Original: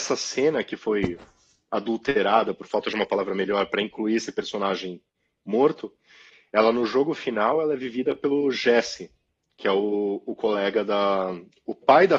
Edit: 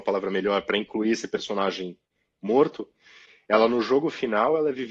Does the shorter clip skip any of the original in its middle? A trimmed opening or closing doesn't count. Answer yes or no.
no